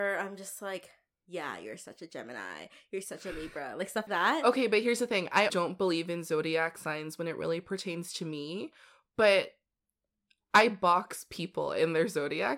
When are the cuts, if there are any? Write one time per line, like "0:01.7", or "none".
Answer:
0:04.1
0:05.5